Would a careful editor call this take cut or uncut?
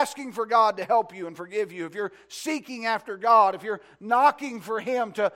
uncut